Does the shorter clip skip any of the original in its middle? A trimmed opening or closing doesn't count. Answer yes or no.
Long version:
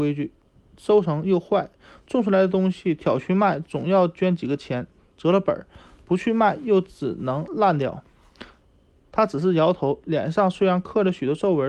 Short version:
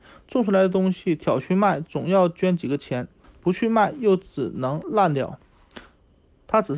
yes